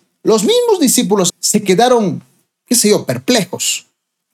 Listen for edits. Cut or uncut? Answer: cut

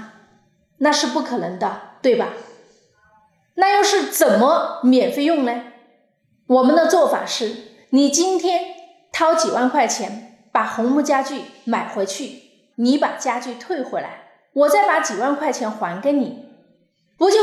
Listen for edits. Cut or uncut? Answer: cut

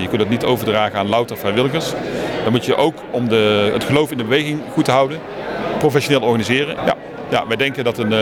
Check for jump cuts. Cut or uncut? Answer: cut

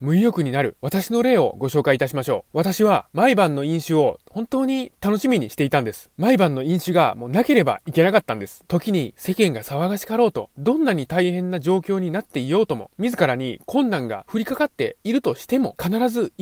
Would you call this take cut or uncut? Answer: cut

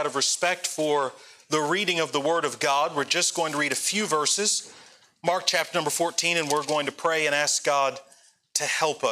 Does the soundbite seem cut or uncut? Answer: uncut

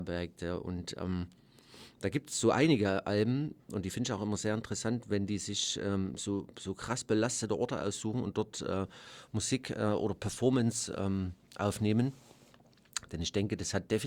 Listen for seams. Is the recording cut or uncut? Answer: uncut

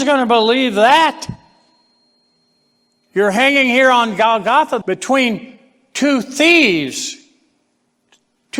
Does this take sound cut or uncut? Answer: cut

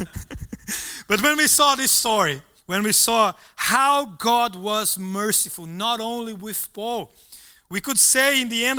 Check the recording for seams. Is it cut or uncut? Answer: uncut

